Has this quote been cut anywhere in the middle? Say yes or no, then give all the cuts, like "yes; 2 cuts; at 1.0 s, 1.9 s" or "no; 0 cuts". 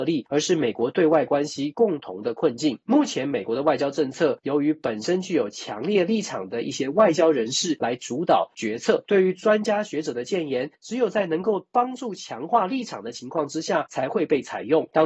no; 0 cuts